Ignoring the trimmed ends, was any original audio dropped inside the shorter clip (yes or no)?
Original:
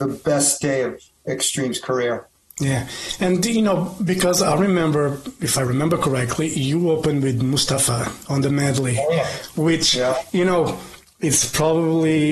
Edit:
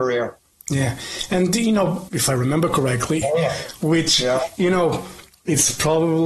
yes